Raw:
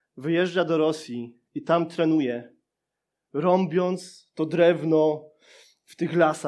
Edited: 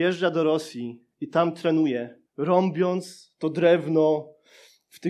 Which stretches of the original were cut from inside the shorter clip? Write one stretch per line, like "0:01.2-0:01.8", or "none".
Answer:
0:02.6-0:03.2